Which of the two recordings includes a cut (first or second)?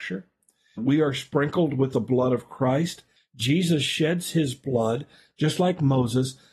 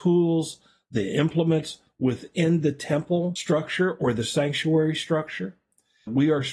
first